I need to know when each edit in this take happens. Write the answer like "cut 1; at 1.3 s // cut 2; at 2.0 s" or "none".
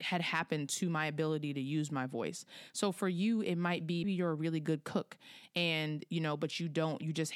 cut 1; at 4.0 s